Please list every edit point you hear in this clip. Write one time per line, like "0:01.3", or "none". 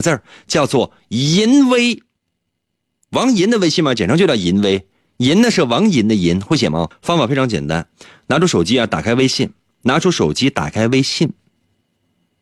0:06.9